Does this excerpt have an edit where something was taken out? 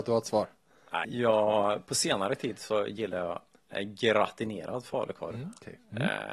yes; 1 cut; at 1.0 s

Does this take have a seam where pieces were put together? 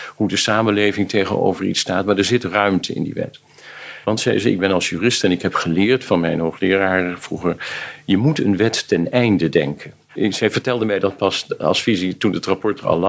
yes; 2 cuts; at 4.0 s, 10.1 s

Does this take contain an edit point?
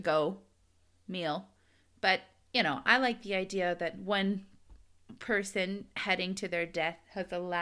no; 0 cuts

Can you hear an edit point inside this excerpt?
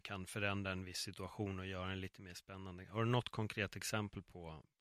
no; 0 cuts

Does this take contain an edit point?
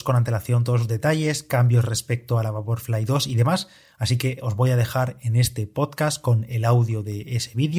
no; 0 cuts

